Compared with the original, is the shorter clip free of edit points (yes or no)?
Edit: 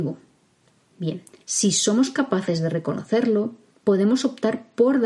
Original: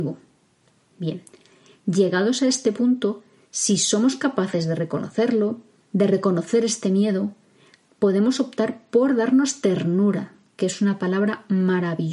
no